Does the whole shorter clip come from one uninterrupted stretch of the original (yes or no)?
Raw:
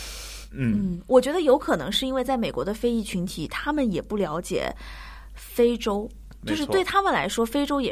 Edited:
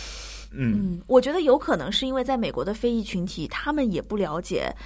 yes